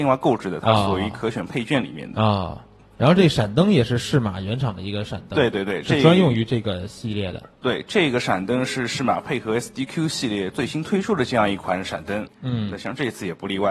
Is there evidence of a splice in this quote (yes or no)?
yes